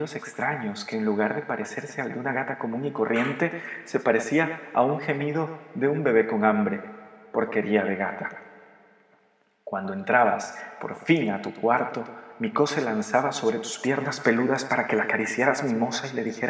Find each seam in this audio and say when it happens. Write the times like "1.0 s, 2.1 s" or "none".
none